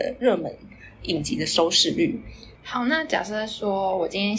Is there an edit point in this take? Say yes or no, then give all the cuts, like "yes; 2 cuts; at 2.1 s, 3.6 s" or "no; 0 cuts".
yes; 1 cut; at 2.6 s